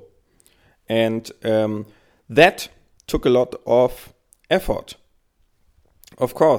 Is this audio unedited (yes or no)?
yes